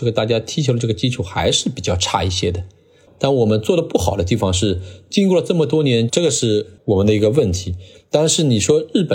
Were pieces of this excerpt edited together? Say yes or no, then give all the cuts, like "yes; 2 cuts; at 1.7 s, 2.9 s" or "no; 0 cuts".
yes; 1 cut; at 6.1 s